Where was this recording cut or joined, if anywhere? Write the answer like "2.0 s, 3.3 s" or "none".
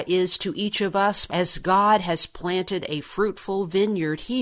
1.3 s